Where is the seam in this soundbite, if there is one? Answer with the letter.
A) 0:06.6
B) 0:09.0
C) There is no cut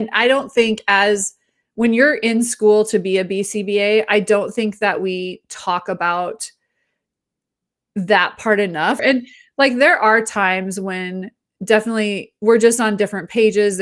B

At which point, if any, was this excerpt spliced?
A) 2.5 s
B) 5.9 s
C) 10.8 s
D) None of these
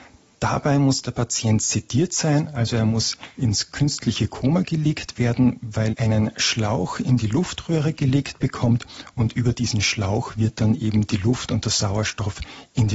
B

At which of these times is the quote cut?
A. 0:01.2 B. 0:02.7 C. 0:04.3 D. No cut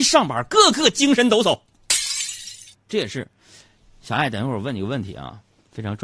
B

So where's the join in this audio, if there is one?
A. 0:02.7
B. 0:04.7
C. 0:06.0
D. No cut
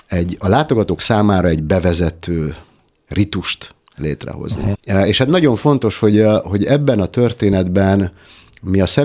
B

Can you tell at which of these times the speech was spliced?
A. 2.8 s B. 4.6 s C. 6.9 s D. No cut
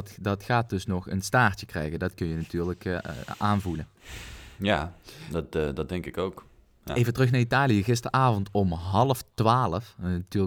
D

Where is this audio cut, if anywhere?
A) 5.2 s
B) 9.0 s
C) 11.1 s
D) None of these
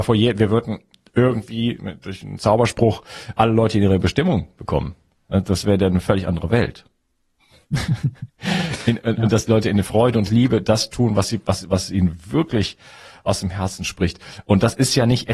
D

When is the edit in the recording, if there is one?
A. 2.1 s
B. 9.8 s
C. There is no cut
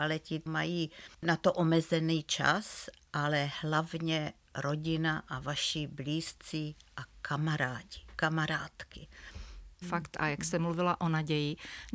B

